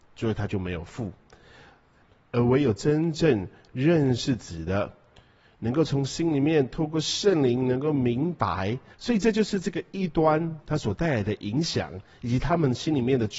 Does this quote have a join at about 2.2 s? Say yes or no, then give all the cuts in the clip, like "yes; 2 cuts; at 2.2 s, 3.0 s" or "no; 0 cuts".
no; 2 cuts; at 8.9 s, 10.6 s